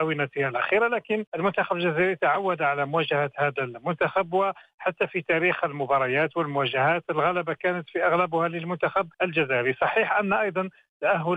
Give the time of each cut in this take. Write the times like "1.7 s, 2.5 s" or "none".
1.3 s, 9.1 s